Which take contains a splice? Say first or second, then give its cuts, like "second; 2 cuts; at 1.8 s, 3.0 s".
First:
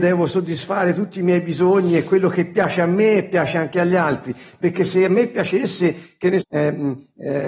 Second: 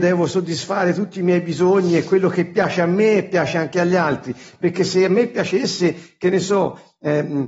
first; 1 cut; at 6.4 s